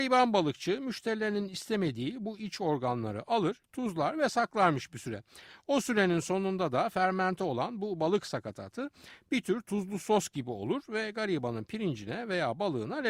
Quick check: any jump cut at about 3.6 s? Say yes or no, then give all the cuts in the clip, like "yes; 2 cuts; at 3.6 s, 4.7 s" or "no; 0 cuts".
yes; 1 cut; at 3.6 s